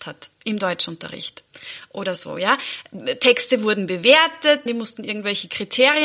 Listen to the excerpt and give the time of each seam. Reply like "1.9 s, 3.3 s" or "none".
4.7 s